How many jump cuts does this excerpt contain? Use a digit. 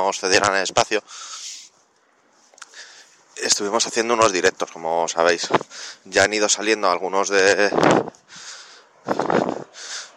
0